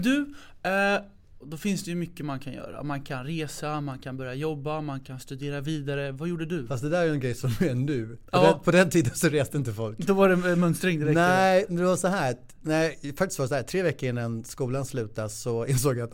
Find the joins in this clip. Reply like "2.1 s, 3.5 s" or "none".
1.4 s